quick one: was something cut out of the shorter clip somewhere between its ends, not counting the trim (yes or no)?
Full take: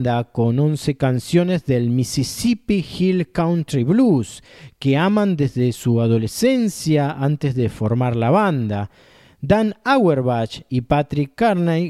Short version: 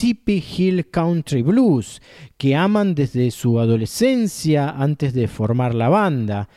no